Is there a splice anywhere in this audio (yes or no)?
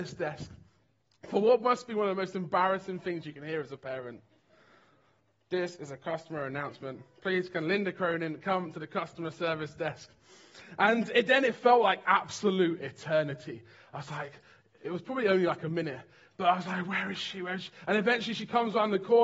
no